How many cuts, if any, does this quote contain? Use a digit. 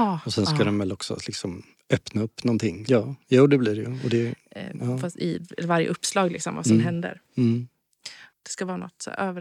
2